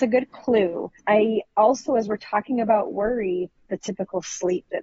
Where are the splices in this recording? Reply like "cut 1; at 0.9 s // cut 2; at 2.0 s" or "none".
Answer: cut 1; at 1.0 s // cut 2; at 3.6 s